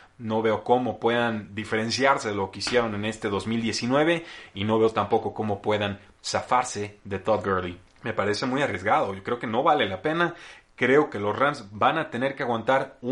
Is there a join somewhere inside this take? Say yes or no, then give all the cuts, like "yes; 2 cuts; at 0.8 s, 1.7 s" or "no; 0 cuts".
yes; 1 cut; at 7.9 s